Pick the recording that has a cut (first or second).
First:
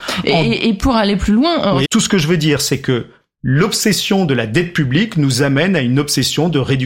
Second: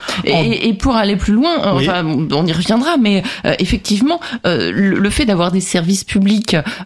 first